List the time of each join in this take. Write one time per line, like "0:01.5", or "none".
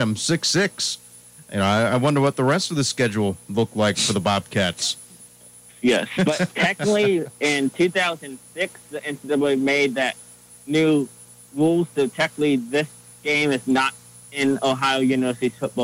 0:06.2